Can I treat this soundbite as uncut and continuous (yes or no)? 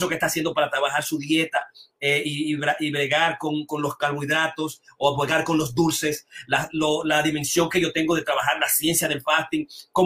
yes